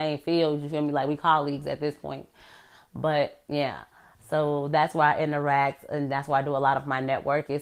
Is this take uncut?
yes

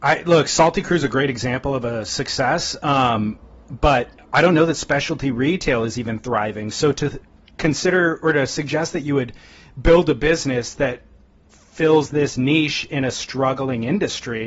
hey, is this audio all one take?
yes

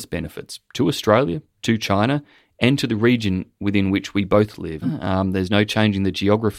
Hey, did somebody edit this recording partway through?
yes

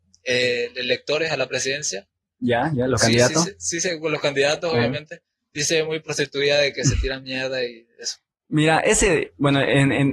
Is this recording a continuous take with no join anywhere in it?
yes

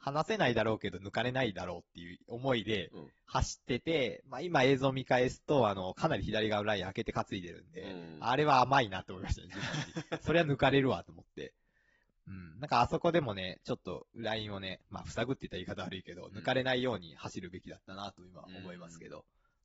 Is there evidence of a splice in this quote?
yes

